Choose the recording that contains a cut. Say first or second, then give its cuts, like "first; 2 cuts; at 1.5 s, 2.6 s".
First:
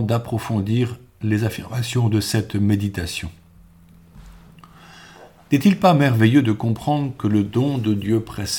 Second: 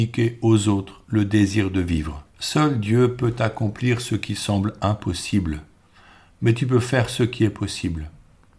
second; 1 cut; at 2.3 s